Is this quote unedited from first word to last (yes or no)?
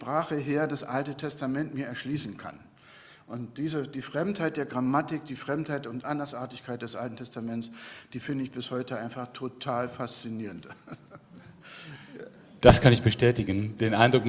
yes